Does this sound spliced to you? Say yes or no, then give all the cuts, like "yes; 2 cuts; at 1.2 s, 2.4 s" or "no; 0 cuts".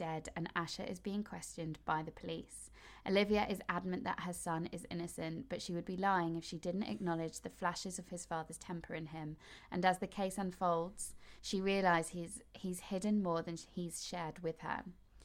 no; 0 cuts